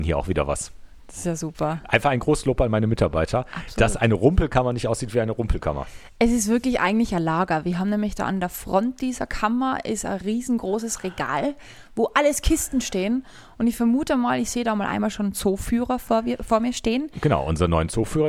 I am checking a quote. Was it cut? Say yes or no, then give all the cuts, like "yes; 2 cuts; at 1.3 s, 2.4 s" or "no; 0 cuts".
no; 0 cuts